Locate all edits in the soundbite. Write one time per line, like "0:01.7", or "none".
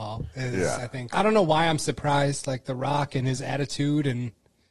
0:01.1

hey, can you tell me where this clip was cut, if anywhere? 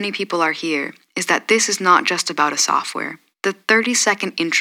0:03.3

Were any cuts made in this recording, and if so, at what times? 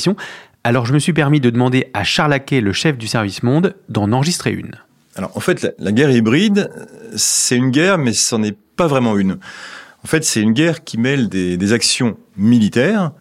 none

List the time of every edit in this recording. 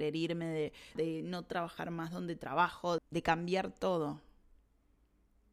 0:01.0
0:03.0

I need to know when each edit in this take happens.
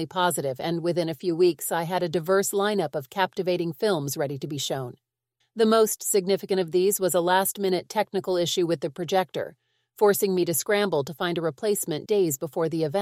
0:05.4
0:12.1

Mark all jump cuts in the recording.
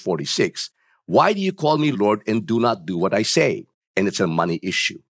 0:01.9
0:03.8

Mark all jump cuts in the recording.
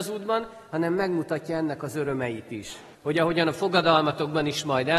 0:02.9

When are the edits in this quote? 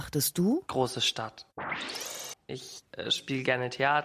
0:02.3

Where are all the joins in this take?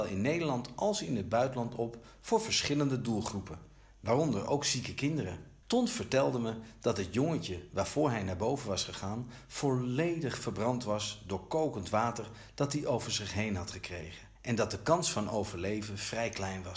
0:05.6
0:14.3

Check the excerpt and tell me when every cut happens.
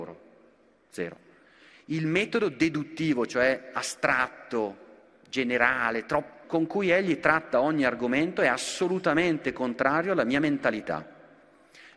0:06.4

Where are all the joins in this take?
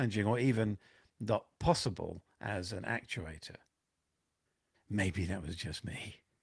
0:04.7

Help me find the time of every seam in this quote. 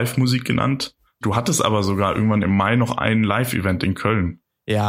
0:01.2

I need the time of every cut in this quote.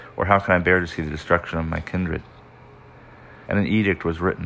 0:03.5

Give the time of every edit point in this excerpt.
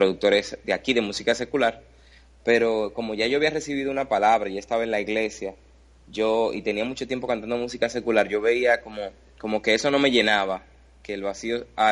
none

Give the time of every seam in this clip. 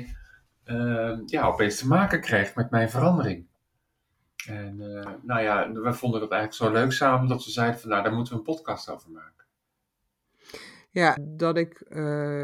0:11.2

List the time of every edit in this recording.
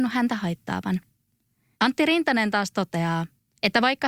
0:01.7

